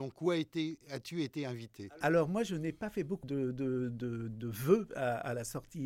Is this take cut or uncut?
cut